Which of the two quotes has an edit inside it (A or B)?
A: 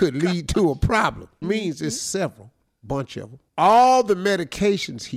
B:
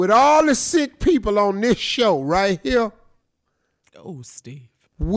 A